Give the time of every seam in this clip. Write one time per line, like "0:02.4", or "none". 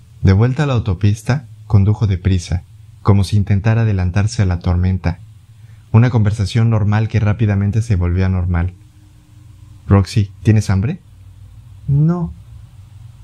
none